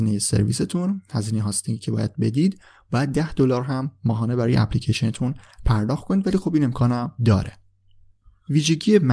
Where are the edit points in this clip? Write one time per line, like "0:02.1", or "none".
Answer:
0:07.2